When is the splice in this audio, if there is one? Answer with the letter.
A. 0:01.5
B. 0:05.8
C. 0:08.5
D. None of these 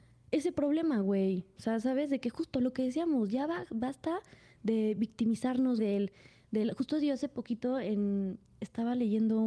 B